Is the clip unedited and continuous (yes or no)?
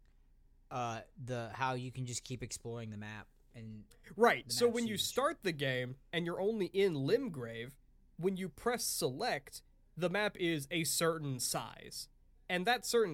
yes